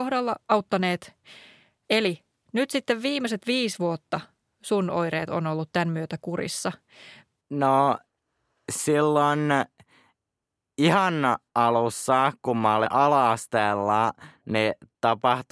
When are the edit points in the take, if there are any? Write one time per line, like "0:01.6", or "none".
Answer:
0:01.8
0:07.4

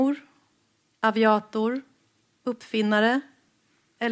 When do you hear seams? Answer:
none

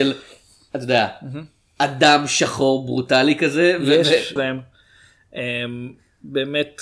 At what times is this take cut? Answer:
0:04.4

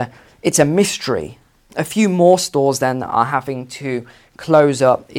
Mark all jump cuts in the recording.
none

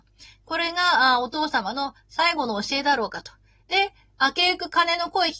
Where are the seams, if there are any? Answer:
0:03.6

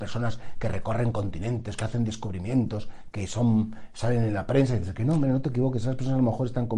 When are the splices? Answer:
none

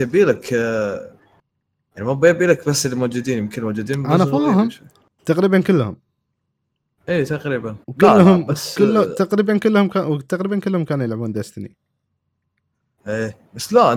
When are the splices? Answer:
0:05.2
0:07.8

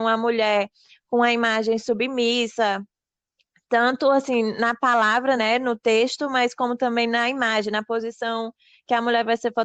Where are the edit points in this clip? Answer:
none

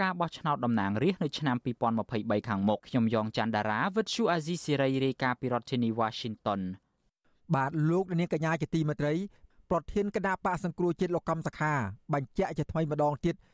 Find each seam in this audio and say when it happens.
0:02.8

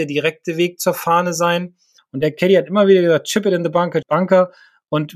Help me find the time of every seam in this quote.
0:02.0
0:04.0

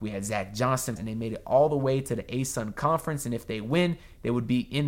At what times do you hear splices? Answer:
0:01.0

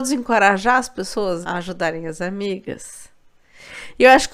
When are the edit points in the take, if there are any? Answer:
0:01.4

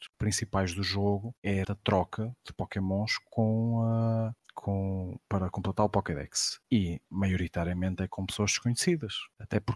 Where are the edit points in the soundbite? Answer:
0:01.6

